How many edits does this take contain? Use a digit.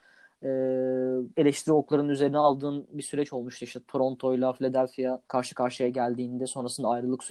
2